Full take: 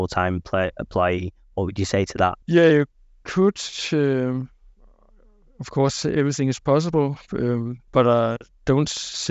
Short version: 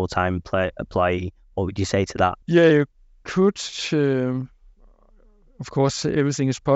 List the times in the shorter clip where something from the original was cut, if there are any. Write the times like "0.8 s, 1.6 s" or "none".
none